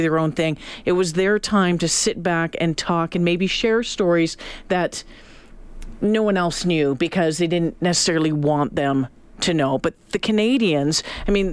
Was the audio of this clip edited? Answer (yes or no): no